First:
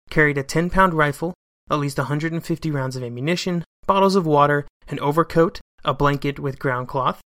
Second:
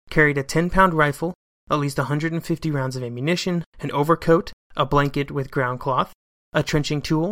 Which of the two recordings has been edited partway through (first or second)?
second